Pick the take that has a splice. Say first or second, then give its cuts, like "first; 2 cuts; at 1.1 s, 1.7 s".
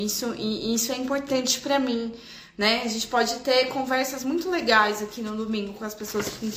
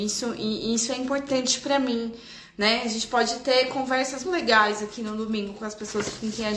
second; 1 cut; at 4.2 s